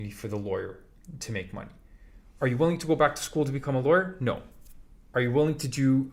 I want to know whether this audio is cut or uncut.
uncut